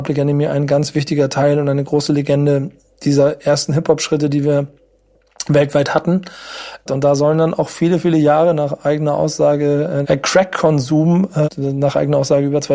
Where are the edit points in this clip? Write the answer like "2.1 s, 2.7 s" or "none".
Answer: 6.9 s, 10.0 s, 11.4 s